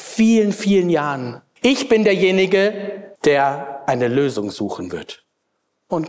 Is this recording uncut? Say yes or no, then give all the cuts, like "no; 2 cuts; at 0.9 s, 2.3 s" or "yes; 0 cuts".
no; 2 cuts; at 1.6 s, 3.2 s